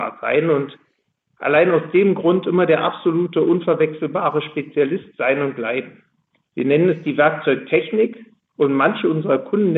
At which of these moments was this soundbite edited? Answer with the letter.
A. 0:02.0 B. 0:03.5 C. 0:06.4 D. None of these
C